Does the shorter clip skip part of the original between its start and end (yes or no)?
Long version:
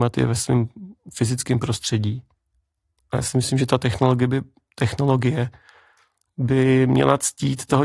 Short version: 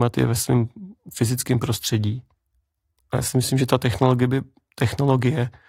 no